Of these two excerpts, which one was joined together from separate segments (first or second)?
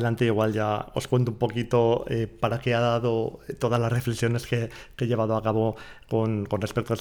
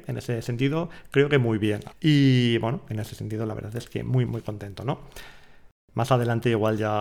second